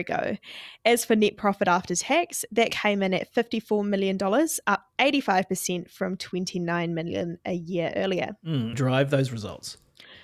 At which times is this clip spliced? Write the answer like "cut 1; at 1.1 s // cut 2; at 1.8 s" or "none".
cut 1; at 8.7 s